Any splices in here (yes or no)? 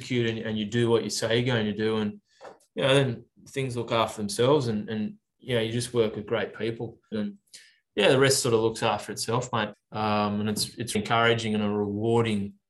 yes